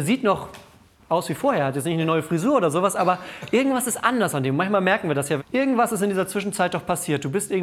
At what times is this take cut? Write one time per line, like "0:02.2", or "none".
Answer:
0:05.4

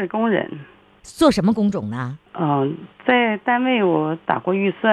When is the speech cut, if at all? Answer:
0:02.3

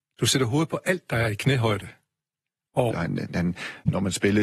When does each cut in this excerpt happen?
0:02.9

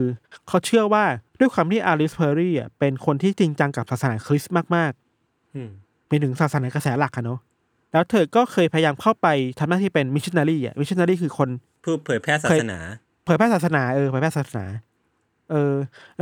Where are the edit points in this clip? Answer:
0:01.3

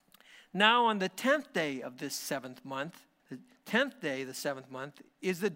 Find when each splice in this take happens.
0:03.2

